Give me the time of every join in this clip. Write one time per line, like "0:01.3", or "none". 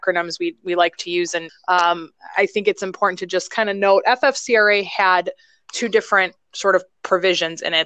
0:01.5